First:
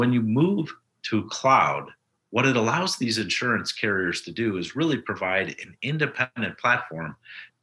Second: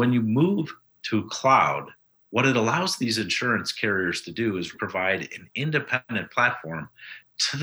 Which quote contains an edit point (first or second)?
second